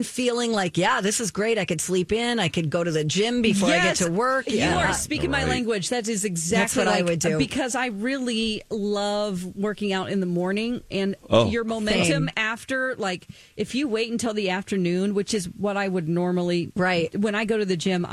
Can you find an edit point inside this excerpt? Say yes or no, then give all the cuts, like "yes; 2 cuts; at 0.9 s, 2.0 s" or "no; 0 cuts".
no; 0 cuts